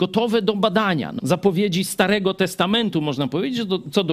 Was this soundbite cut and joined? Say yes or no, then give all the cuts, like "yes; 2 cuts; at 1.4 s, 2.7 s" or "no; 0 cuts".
yes; 1 cut; at 1.2 s